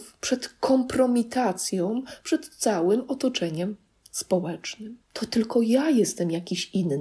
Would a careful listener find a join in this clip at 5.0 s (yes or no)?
yes